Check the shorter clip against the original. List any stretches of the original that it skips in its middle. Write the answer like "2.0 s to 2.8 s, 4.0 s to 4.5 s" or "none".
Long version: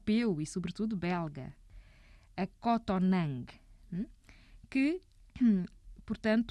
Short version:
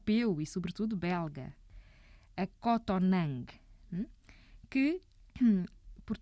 none